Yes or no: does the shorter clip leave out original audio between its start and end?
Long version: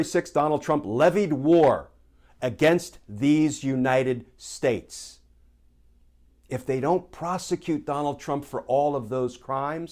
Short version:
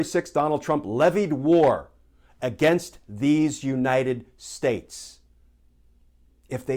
no